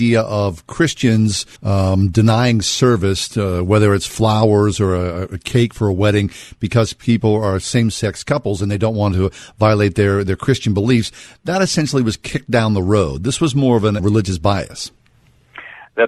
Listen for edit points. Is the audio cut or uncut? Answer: cut